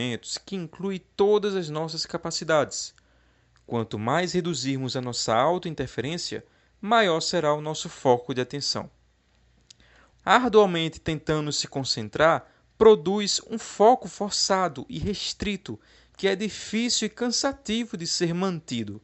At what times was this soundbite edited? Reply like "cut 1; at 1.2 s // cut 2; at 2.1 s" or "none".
cut 1; at 10.1 s